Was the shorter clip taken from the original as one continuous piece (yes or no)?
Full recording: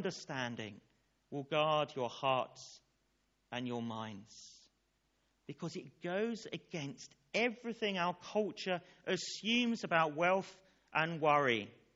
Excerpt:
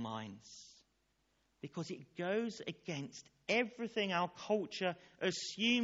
yes